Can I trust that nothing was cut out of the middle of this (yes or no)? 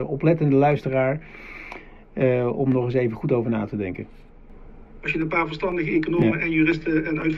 yes